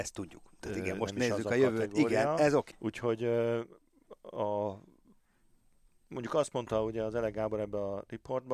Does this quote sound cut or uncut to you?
cut